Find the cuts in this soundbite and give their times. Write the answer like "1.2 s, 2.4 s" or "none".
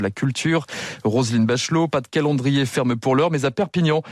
none